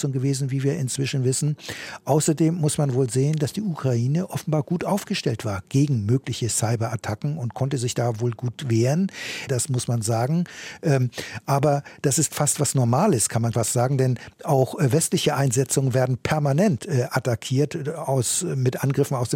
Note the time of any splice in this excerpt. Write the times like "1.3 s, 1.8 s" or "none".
9.5 s, 13.5 s